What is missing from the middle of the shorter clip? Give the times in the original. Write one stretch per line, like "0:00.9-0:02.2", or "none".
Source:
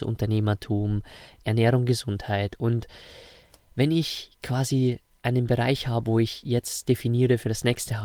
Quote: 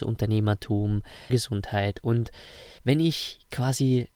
0:01.3-0:01.9
0:03.3-0:03.7